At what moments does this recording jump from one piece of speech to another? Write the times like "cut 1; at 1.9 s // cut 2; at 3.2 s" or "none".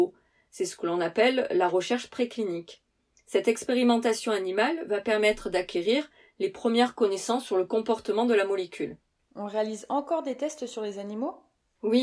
none